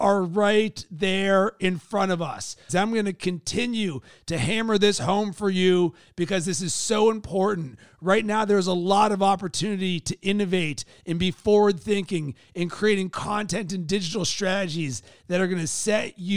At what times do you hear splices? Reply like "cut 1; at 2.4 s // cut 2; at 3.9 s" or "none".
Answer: cut 1; at 2.7 s